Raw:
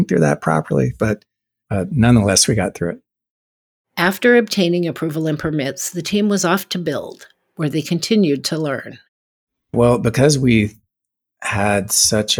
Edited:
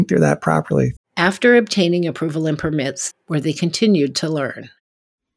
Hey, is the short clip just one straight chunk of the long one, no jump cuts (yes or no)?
no